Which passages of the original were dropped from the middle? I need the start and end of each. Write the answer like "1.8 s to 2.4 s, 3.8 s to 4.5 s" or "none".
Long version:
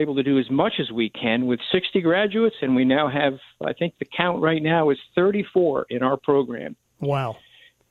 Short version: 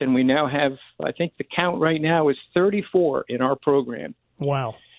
none